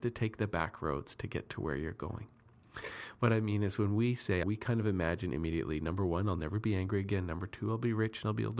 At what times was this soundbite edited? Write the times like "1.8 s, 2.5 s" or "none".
4.4 s